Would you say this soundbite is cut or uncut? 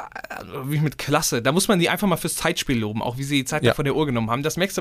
uncut